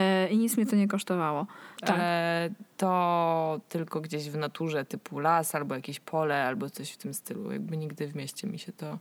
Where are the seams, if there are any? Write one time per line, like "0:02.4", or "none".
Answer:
0:01.8